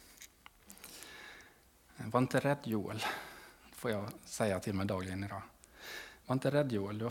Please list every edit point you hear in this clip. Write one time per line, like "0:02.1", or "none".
none